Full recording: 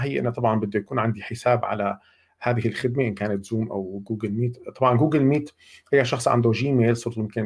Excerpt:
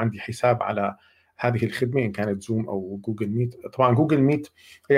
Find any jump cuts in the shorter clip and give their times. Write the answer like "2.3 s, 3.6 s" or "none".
none